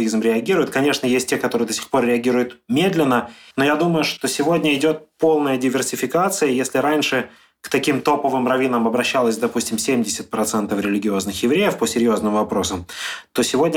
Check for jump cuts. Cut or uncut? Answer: cut